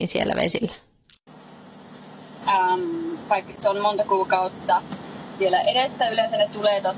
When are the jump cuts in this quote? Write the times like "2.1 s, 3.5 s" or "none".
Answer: 2.4 s